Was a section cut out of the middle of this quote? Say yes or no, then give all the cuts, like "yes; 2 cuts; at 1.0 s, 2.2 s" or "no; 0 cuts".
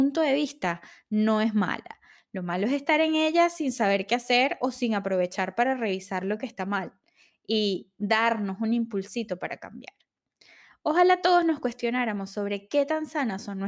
no; 0 cuts